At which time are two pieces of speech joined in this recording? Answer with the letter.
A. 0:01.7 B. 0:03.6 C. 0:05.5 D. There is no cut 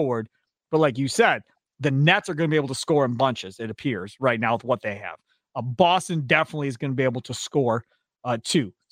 D